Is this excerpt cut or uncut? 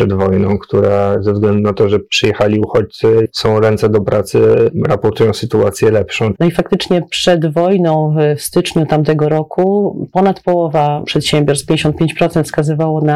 cut